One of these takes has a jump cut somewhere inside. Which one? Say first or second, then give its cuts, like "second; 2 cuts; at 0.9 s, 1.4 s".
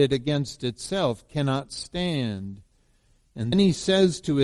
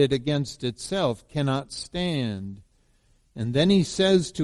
first; 1 cut; at 3.5 s